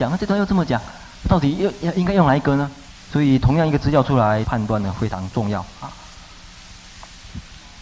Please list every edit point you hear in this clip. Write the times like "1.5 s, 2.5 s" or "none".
3.0 s, 4.4 s